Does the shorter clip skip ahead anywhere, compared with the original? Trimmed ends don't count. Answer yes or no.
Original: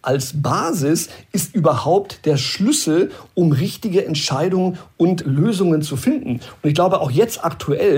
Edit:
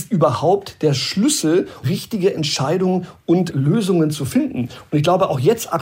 yes